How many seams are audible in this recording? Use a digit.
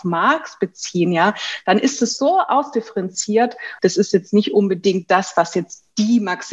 1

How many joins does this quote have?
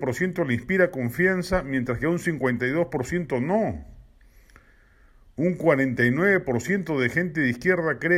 0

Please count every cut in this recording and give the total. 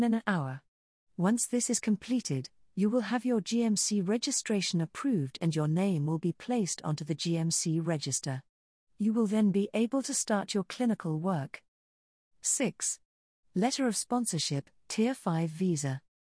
0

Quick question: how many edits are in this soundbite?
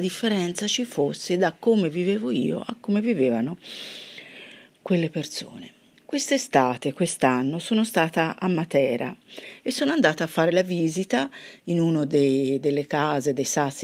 0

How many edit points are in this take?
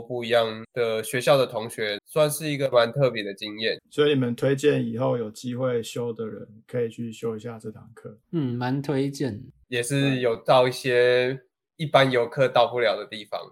3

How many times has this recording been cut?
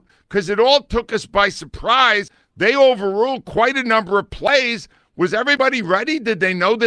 0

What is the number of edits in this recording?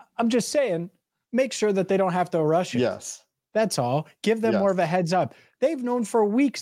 0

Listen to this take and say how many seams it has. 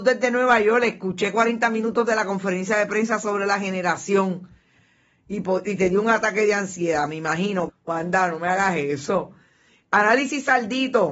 1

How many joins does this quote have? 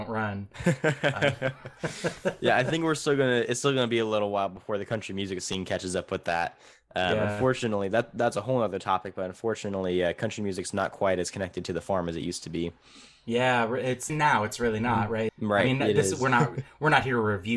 2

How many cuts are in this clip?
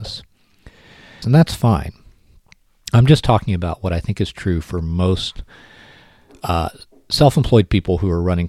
1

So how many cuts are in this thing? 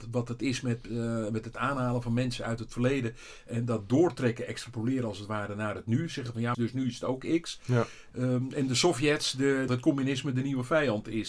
3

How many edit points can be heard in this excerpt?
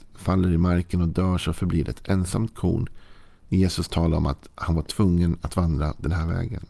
1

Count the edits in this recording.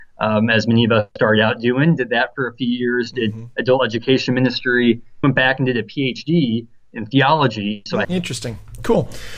2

